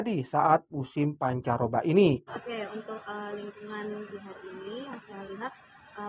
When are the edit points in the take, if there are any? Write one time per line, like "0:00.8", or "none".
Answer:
0:02.3
0:04.1